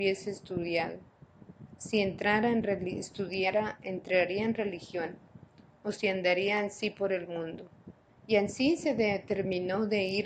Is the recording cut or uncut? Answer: cut